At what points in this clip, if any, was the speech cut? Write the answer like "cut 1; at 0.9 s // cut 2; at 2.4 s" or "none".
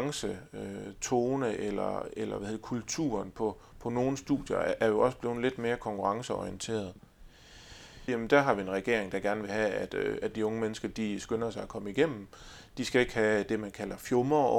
cut 1; at 8.1 s

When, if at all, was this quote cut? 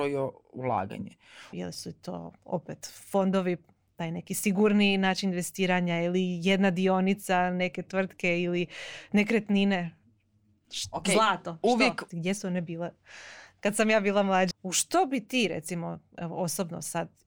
cut 1; at 1.5 s // cut 2; at 12.1 s // cut 3; at 14.5 s

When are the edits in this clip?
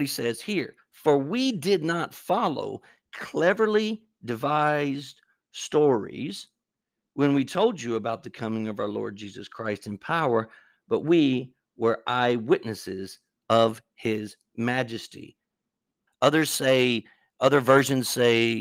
cut 1; at 16.1 s

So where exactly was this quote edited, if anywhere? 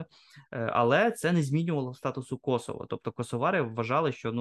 none

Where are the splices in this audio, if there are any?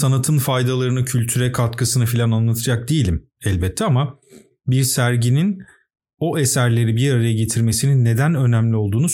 none

